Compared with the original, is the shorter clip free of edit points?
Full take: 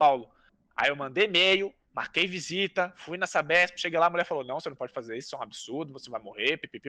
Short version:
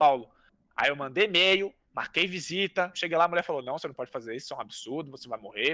no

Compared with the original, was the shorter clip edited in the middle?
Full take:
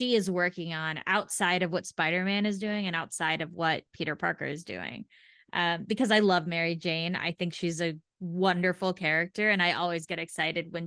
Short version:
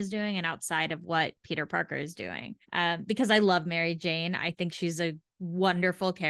yes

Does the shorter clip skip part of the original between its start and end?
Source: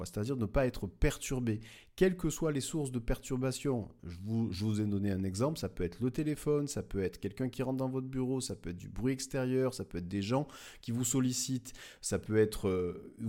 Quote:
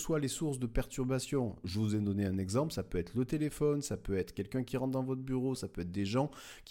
yes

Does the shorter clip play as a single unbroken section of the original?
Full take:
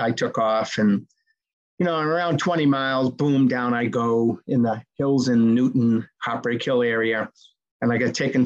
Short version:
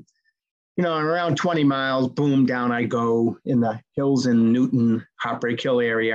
yes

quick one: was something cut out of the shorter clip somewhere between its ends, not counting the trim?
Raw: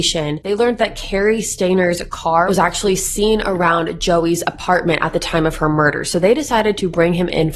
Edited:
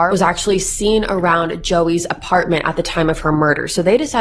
no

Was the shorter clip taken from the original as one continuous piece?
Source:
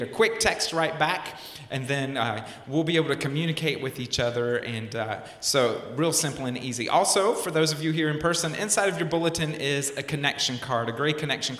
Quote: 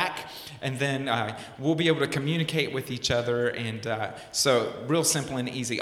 yes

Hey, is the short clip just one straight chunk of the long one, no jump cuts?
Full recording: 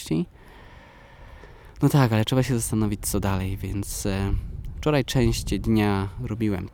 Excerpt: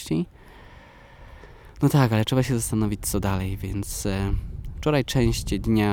yes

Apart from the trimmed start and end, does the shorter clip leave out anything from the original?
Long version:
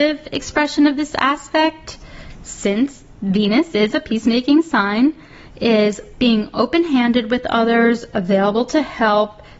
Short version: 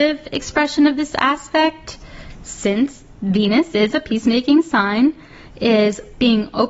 no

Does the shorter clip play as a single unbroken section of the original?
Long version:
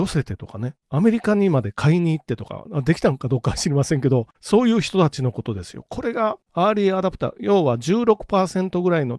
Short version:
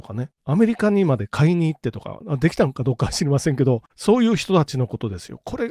yes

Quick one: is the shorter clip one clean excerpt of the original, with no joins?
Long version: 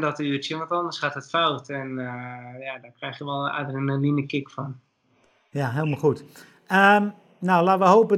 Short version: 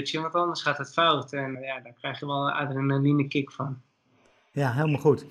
no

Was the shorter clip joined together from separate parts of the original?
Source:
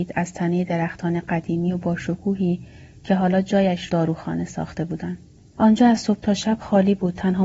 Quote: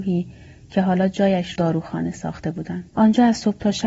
yes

